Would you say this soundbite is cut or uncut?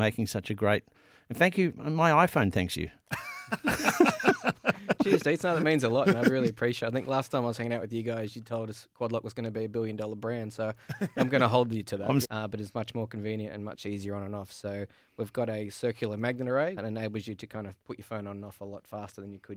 cut